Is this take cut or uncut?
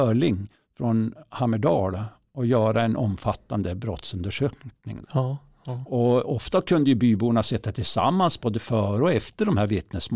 cut